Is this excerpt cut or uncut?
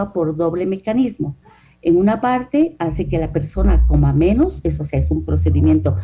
uncut